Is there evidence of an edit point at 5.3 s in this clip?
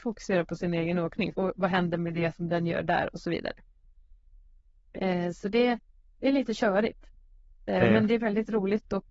no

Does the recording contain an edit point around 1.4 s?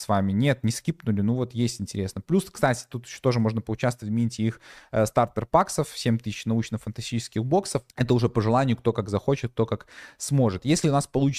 no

